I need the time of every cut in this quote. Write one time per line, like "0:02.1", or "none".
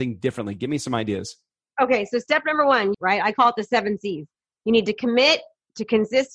0:02.9